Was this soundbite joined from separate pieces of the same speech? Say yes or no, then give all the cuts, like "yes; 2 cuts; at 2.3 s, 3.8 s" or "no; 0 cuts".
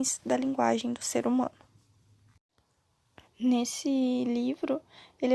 yes; 1 cut; at 3.3 s